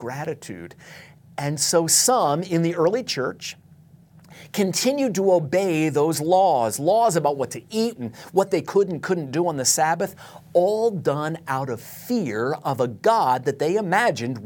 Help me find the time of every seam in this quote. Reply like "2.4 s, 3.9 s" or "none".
8.0 s